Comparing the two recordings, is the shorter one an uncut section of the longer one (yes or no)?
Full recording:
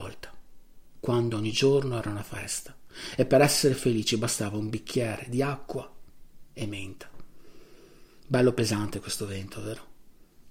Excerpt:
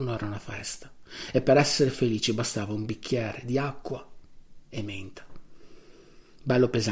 yes